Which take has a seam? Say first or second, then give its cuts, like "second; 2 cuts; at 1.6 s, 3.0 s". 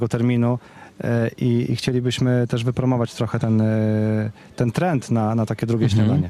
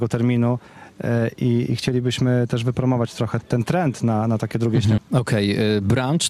second; 2 cuts; at 3.4 s, 5.0 s